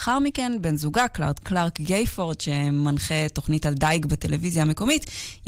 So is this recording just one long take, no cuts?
no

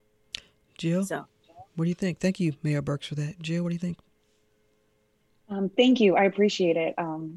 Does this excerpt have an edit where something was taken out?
no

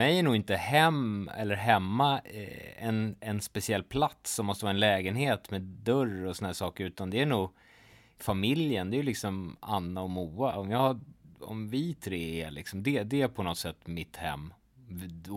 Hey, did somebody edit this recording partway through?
no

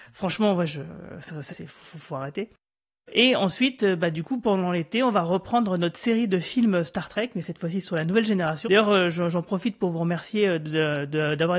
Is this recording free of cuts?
no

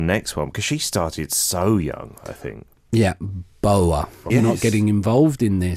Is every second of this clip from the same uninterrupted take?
no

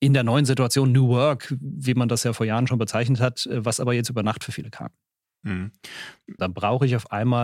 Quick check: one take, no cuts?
no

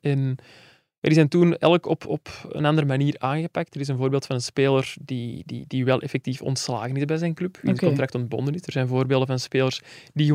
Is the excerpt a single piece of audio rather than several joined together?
yes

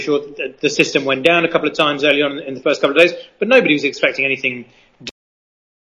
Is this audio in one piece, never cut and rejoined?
yes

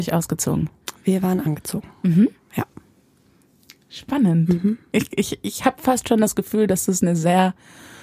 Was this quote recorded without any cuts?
yes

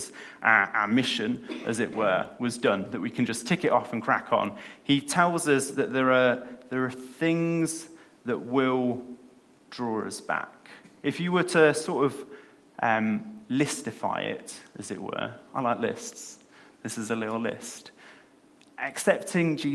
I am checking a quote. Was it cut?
no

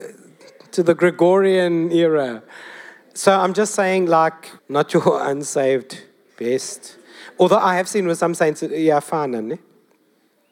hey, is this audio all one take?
no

